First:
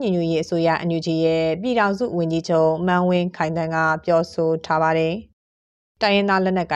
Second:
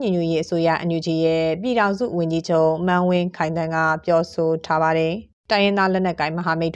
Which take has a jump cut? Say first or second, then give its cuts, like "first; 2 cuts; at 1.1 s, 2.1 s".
second; 1 cut; at 5.4 s